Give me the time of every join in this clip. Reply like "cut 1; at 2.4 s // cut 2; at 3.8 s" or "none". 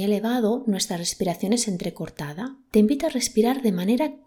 cut 1; at 2.7 s